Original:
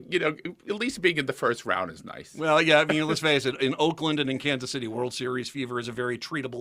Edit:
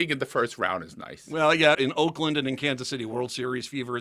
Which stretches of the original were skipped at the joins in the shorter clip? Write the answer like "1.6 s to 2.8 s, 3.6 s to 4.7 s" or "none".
2.8 s to 3.6 s